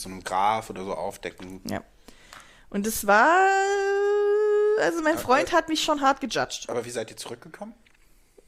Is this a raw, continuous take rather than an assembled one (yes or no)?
yes